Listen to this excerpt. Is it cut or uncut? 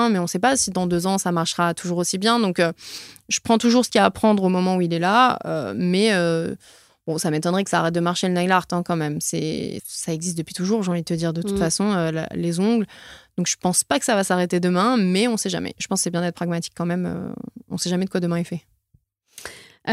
cut